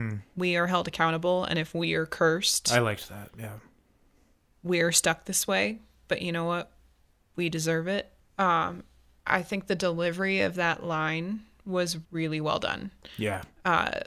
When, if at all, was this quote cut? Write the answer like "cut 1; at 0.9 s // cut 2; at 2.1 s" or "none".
cut 1; at 8.2 s // cut 2; at 12.0 s